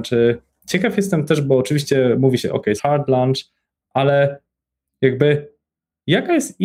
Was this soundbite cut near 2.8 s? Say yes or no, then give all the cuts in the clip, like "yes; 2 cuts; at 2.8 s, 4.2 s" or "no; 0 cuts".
yes; 1 cut; at 2.8 s